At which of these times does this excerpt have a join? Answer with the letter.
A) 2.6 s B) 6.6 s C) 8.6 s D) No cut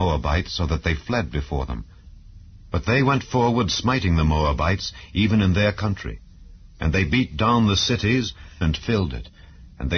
C